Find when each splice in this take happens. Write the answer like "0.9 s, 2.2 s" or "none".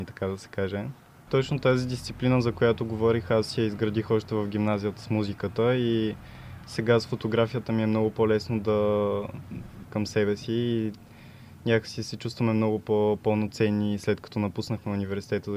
1.3 s, 9.8 s